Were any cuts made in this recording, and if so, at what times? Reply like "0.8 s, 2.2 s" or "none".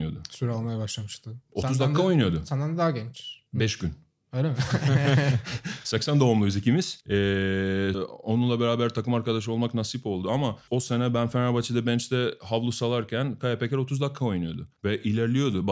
7.9 s